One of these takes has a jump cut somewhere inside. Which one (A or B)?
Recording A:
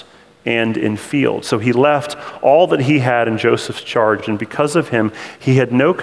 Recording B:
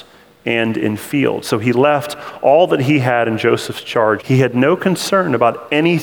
B